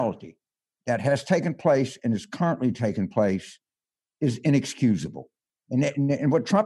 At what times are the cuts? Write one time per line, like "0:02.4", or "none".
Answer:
none